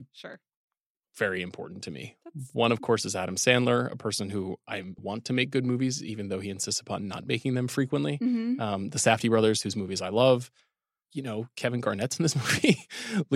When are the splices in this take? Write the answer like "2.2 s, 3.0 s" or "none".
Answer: 5.0 s